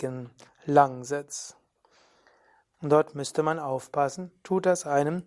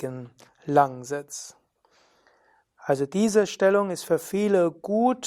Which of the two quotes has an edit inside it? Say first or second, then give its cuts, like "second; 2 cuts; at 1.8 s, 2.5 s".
first; 1 cut; at 2.7 s